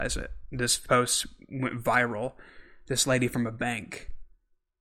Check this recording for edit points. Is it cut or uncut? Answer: uncut